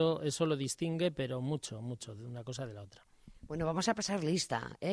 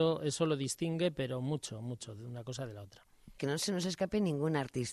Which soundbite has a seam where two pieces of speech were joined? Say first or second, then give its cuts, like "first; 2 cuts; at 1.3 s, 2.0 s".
second; 1 cut; at 3.4 s